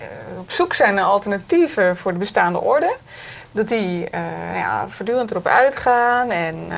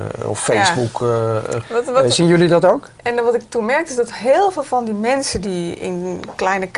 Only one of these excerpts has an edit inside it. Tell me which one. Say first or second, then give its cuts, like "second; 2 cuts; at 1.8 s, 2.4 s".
second; 2 cuts; at 1.6 s, 3.0 s